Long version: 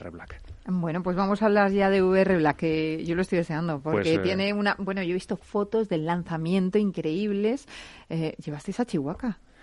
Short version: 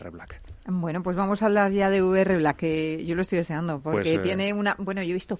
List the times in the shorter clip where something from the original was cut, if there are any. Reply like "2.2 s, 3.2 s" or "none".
none